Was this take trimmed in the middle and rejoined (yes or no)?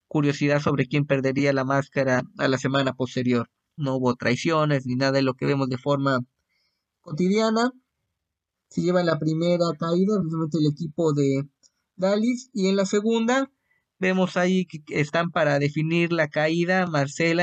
yes